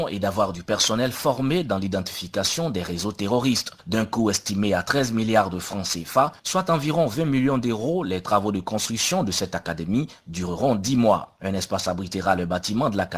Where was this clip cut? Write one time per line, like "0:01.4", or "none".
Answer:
0:11.4